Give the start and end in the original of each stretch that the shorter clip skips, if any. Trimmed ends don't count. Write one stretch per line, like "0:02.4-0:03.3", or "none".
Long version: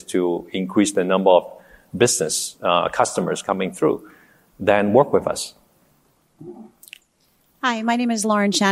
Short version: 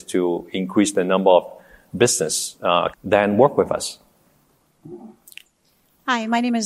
0:02.9-0:04.5